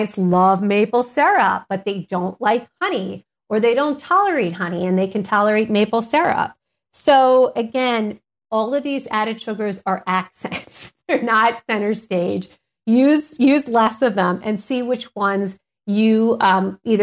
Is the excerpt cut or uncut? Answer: uncut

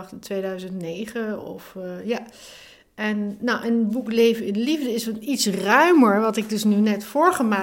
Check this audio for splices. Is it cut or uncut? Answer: uncut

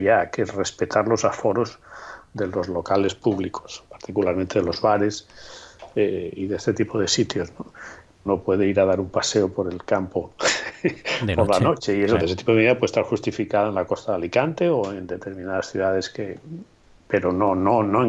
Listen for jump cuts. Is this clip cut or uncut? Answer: cut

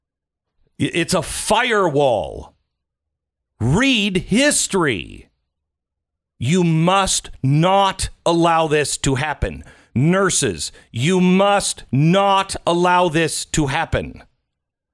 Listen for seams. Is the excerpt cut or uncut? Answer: cut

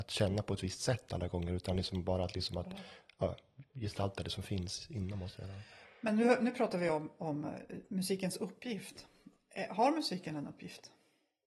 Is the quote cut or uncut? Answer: uncut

